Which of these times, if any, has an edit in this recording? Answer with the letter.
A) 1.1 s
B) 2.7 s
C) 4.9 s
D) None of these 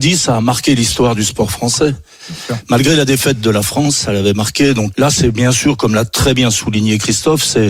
C